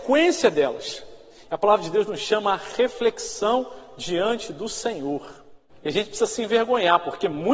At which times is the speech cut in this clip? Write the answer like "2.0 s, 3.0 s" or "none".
1.3 s, 5.7 s

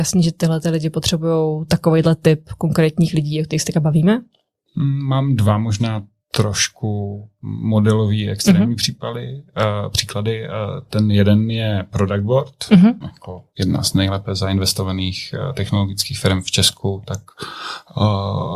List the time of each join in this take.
13.0 s

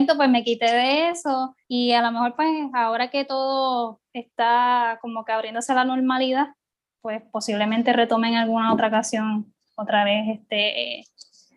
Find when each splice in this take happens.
1.6 s

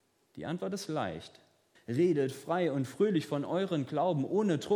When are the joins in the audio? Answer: 1.8 s

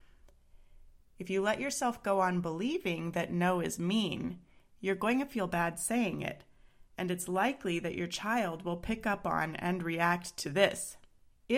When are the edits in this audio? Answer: none

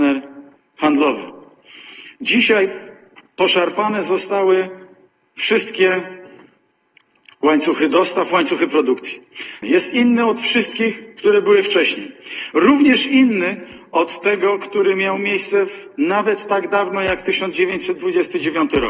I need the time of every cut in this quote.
9.6 s

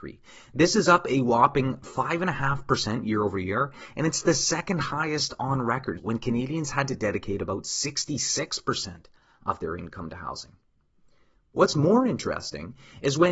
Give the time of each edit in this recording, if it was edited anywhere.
6.0 s

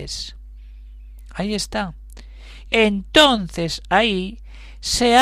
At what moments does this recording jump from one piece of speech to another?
2.7 s

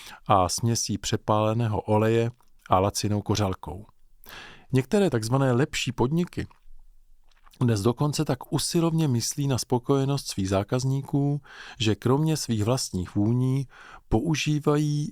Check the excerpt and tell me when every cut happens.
4.7 s

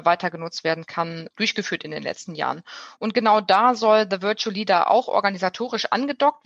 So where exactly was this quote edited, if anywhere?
none

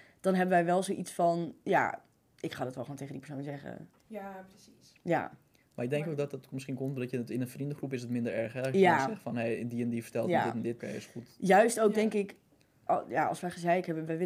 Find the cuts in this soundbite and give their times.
4.0 s, 10.8 s, 12.9 s

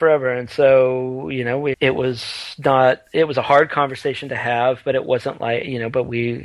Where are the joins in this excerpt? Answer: 1.7 s

